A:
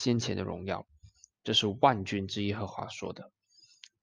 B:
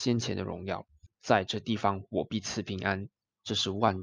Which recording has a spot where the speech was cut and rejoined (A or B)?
B